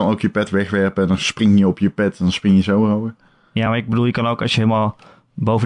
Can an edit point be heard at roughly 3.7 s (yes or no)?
no